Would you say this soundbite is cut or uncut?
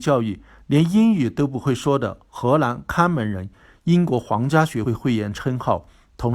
cut